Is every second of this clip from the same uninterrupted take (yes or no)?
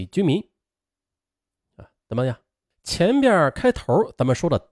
no